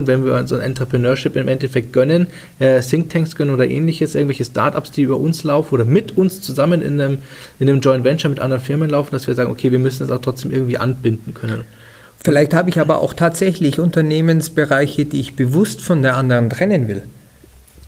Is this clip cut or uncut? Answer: uncut